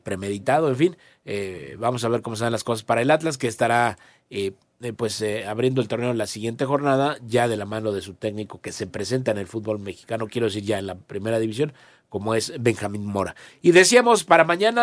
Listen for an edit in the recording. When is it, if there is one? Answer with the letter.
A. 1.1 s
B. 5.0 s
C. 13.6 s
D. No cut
D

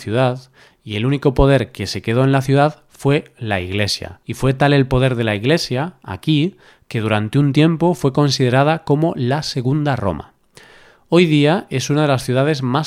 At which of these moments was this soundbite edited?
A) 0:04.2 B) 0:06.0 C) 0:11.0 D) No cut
A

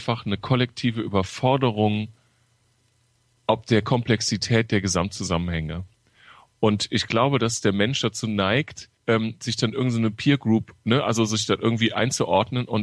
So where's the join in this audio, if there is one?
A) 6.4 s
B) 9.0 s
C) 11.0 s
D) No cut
B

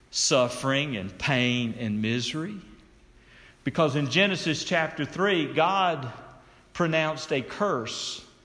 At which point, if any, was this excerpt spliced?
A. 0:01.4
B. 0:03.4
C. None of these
C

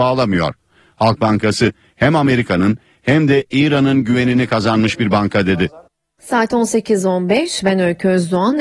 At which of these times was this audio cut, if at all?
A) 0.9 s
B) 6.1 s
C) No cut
C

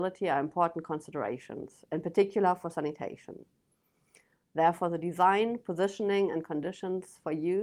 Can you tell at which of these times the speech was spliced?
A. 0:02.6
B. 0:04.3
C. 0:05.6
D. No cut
B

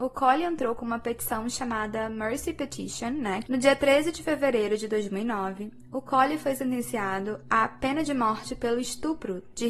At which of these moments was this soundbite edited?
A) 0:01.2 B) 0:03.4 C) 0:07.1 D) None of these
B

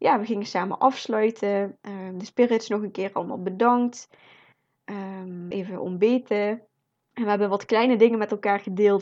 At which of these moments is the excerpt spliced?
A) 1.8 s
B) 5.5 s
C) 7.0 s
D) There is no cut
B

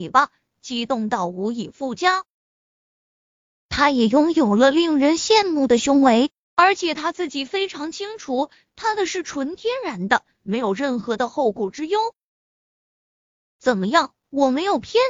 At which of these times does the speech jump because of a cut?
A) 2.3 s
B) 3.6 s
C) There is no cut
C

